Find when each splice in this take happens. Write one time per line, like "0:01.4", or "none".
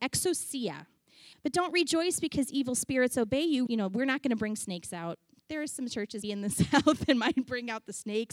0:01.3
0:03.7
0:06.2